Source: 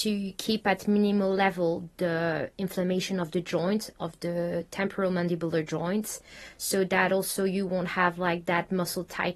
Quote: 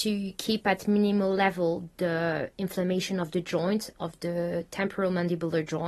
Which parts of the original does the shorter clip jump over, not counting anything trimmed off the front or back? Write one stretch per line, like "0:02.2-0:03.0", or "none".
none